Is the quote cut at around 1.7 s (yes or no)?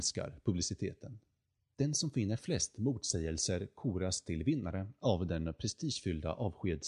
yes